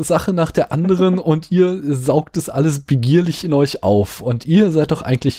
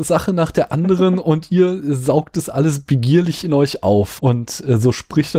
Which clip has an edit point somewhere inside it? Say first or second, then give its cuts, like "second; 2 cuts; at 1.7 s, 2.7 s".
second; 1 cut; at 4.2 s